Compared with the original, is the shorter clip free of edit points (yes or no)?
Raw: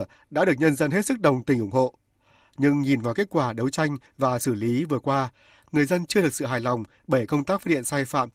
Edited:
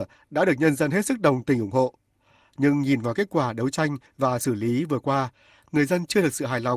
yes